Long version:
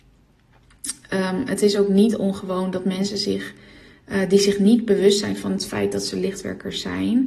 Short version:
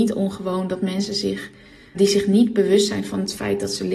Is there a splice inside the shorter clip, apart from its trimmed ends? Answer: yes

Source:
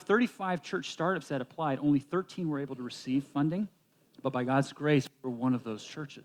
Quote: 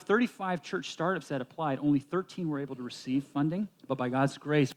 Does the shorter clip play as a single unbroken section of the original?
no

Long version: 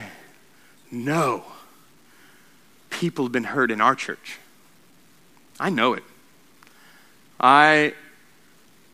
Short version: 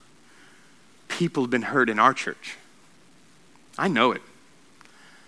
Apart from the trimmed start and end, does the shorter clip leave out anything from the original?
no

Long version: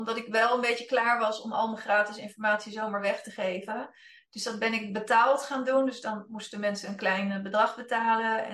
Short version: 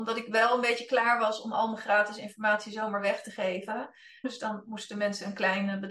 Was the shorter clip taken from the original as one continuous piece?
no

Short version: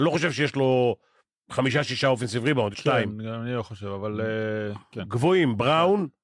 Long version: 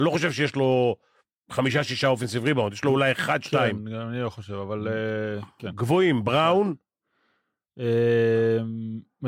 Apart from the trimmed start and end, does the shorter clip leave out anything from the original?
yes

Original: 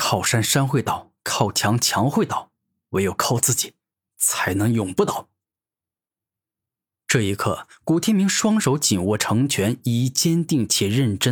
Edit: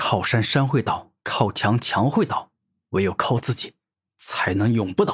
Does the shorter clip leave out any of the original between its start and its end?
no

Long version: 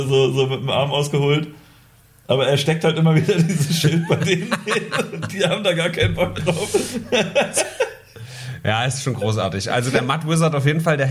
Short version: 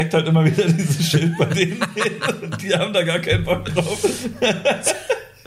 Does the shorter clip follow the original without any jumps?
yes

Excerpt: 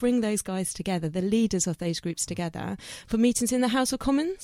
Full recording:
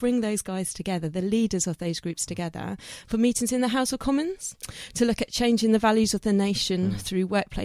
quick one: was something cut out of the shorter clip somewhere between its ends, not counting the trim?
no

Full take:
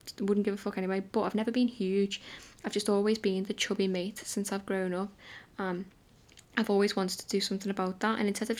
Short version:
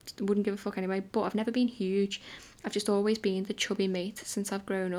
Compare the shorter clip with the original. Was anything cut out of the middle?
no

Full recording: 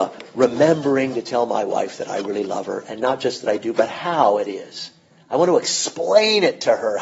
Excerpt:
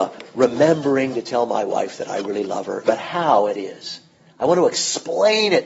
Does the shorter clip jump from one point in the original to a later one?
yes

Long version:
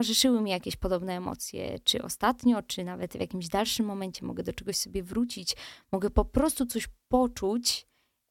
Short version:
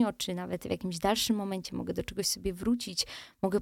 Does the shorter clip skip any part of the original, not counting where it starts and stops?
no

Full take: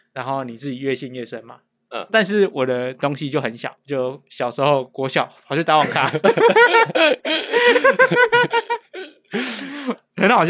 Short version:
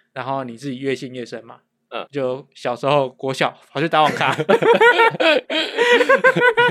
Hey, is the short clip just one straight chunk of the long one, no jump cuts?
no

